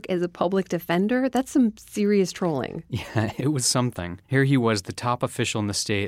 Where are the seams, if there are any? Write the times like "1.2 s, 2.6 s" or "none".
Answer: 4.2 s

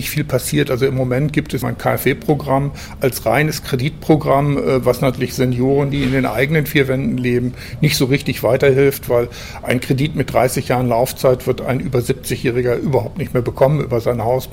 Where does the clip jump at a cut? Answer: 1.6 s

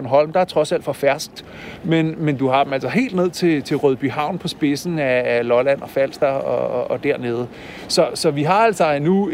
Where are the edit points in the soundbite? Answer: none

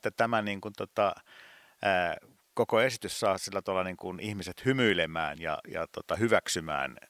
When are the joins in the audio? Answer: none

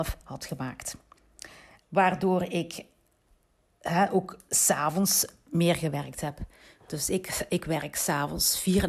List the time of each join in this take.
1.8 s

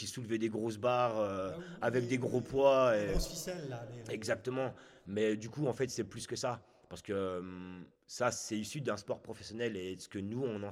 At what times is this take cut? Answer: 8.0 s

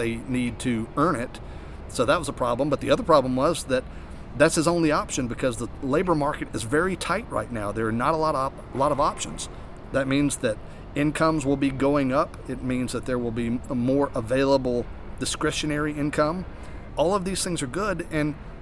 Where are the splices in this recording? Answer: 9.9 s, 16.9 s

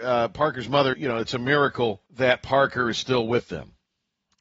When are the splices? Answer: 0.9 s, 2.1 s

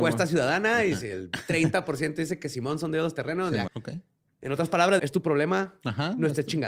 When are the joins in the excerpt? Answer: 3.7 s, 5.0 s

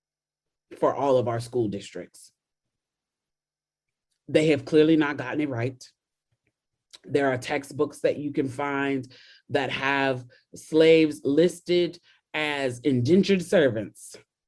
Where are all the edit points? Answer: none

